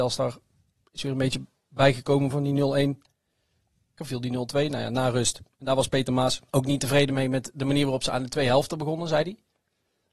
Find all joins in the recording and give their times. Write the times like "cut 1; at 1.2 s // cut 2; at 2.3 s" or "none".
cut 1; at 4.0 s // cut 2; at 6.5 s